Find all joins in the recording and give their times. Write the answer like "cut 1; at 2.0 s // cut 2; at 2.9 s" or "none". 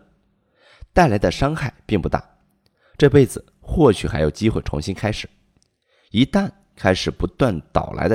cut 1; at 3.0 s